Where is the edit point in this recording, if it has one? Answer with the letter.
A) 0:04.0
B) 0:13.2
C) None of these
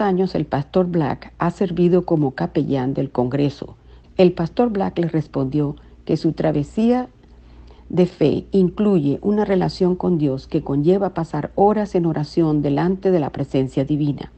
A